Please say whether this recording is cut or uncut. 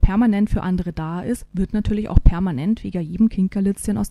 uncut